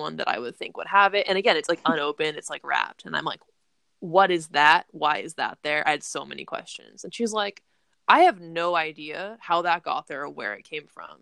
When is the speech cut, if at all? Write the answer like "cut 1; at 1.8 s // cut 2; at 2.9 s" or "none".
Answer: none